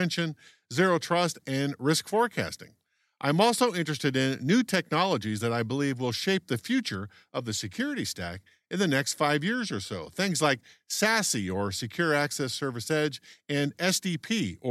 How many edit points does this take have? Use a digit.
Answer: 0